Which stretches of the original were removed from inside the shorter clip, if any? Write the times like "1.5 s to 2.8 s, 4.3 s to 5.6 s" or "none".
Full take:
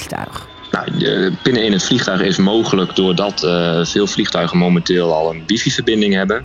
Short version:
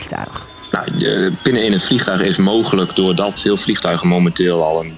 3.4 s to 3.9 s